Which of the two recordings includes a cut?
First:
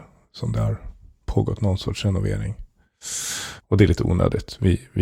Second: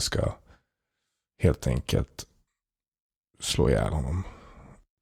first; 1 cut; at 3.6 s

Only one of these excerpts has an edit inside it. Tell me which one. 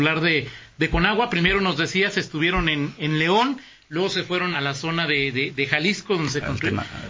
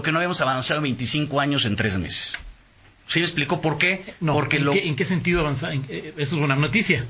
first; 1 cut; at 4.5 s

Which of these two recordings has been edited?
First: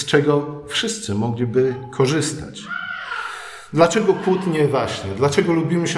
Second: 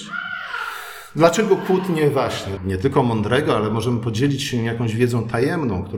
second; 1 cut; at 2.6 s

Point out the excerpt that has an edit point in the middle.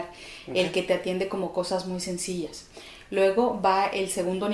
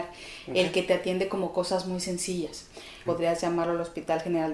second; 1 cut; at 3.1 s

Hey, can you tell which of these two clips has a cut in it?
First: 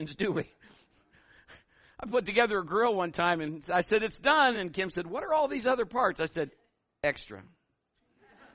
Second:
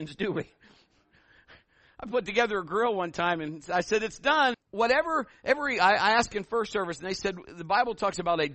second; 1 cut; at 4.5 s

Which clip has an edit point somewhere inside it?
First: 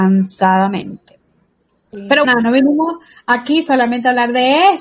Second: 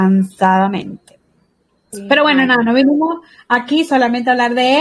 first; 1 cut; at 2.2 s

